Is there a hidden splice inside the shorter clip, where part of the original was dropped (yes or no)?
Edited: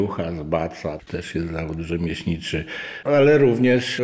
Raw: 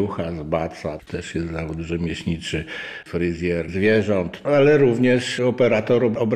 yes